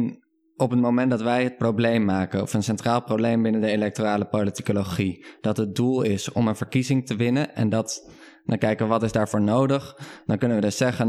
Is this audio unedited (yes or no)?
yes